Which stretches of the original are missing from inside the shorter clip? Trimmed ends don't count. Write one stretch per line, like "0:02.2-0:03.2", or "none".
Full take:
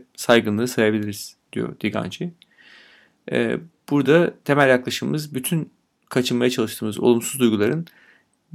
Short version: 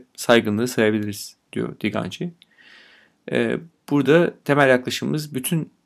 none